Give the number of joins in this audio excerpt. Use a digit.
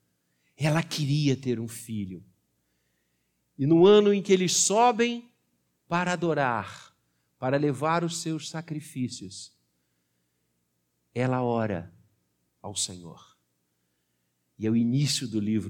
0